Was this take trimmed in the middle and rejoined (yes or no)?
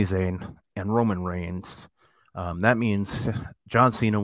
no